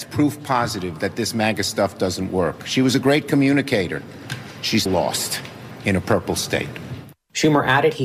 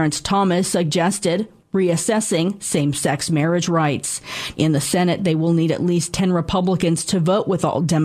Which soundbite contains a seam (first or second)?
first